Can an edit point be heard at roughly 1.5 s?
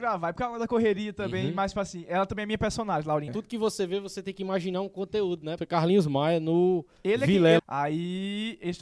no; 3 cuts; at 3.3 s, 5.6 s, 7.6 s

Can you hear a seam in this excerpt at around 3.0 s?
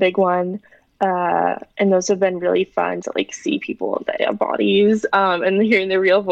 yes; 2 cuts; at 3.0 s, 4.2 s

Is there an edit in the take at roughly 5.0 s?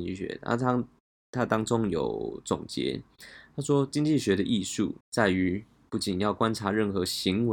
yes; 1 cut; at 5.0 s

